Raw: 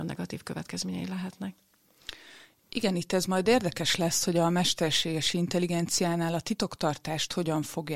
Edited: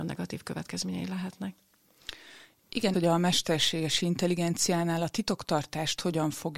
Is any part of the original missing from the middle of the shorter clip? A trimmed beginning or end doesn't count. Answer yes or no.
yes